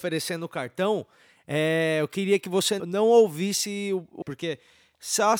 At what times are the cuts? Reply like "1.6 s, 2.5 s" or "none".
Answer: 2.8 s, 4.2 s